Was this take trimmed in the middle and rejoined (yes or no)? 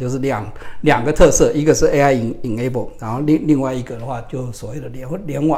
no